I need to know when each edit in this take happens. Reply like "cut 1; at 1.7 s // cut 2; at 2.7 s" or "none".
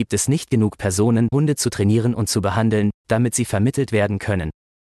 cut 1; at 1.3 s